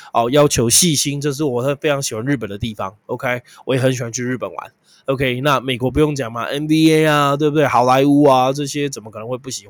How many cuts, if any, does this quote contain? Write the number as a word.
zero